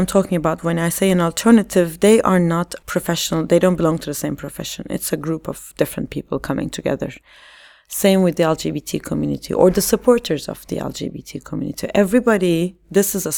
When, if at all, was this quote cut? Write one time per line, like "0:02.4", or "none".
none